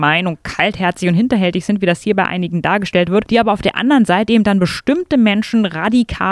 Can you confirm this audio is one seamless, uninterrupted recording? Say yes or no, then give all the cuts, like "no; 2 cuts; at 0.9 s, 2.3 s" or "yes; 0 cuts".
yes; 0 cuts